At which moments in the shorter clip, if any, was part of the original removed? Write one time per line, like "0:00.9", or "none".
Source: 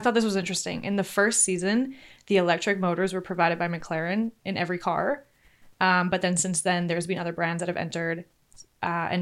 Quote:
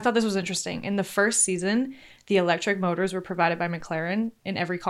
none